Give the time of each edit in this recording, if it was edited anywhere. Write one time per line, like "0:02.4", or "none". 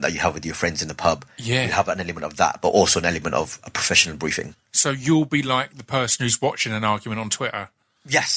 none